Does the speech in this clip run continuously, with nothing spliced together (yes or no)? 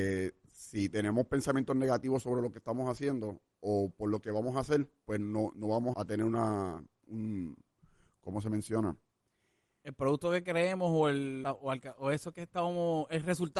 no